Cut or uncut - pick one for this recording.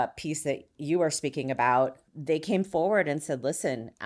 cut